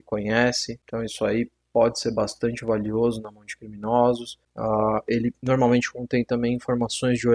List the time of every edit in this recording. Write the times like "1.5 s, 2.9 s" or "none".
none